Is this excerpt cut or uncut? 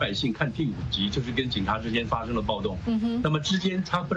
uncut